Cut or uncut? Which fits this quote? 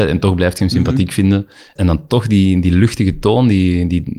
cut